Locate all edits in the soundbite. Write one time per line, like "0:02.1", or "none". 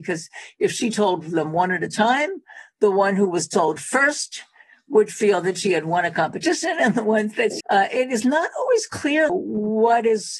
0:07.6
0:09.3